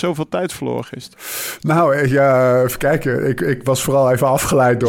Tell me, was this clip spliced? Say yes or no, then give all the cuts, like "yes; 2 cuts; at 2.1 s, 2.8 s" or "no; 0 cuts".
no; 0 cuts